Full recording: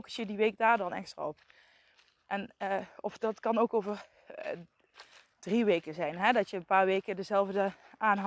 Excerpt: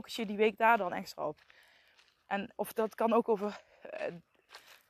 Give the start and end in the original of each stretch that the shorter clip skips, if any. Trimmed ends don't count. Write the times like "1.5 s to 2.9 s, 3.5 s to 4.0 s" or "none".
2.6 s to 3.0 s